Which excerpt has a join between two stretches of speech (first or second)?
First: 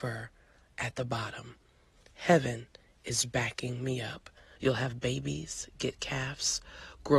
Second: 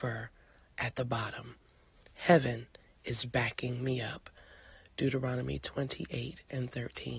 first